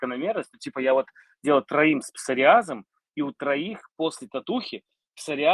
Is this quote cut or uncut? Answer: uncut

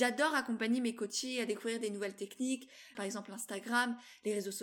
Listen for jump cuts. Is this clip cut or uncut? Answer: cut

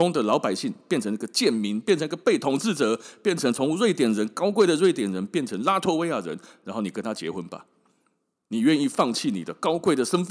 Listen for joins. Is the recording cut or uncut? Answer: uncut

